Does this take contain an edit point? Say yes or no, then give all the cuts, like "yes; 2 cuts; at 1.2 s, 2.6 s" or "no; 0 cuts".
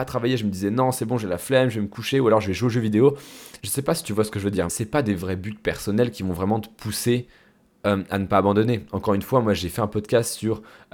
yes; 2 cuts; at 3.6 s, 4.7 s